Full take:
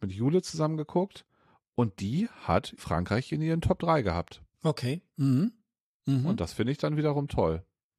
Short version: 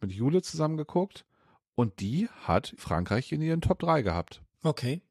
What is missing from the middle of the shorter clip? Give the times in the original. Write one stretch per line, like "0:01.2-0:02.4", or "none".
none